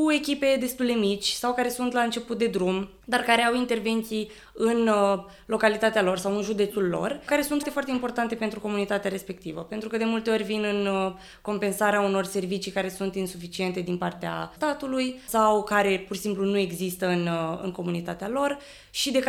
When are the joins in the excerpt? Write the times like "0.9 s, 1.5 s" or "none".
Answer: 7.6 s